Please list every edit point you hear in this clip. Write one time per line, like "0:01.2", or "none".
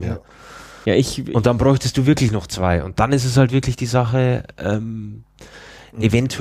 none